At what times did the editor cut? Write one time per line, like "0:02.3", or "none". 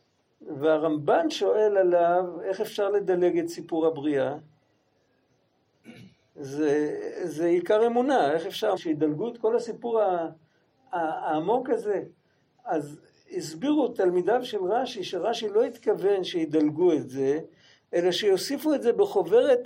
0:08.8